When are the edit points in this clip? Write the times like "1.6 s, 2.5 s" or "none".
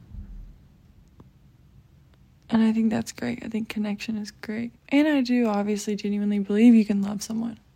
4.8 s